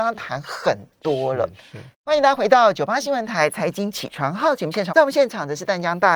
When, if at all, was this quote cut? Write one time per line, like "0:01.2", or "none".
0:01.9
0:04.9